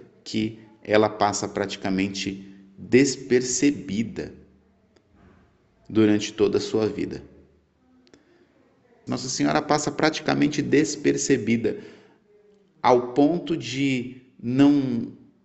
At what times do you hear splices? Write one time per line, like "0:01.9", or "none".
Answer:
0:09.1